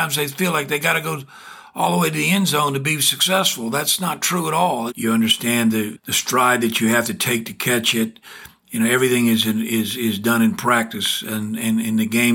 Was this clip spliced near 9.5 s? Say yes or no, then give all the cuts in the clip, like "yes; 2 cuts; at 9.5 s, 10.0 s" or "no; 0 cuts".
no; 1 cut; at 4.9 s